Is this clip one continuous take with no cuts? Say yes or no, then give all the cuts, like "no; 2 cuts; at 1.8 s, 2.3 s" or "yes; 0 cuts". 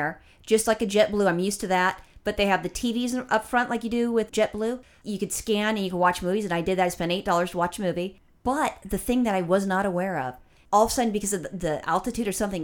no; 1 cut; at 4.3 s